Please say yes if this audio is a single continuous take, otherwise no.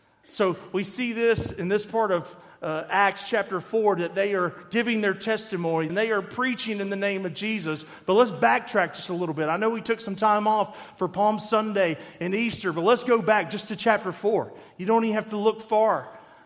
no